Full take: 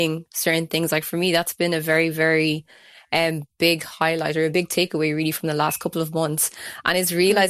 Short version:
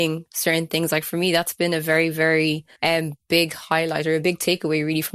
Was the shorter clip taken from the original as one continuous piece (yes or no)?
no